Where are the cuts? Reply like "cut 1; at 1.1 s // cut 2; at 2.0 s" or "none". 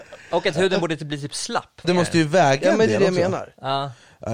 cut 1; at 1.8 s